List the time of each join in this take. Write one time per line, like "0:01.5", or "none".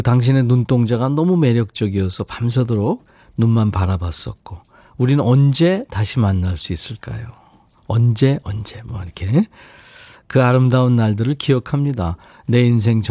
0:08.4

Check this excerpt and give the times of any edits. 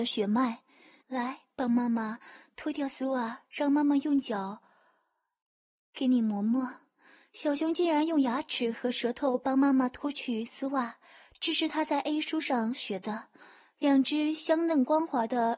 0:01.0

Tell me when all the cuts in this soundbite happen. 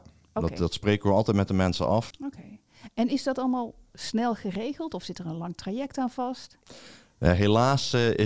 0:02.1

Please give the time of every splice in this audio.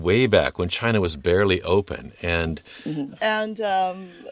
0:03.1

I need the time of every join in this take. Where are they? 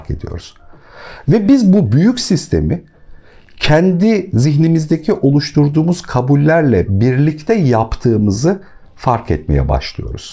none

